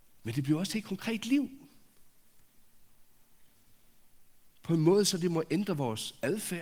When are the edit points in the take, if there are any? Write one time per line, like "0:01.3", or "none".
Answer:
none